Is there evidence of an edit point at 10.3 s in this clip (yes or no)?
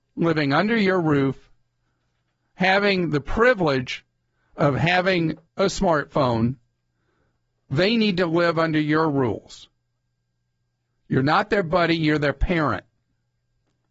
no